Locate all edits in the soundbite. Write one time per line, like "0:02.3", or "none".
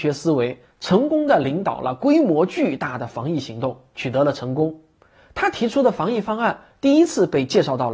none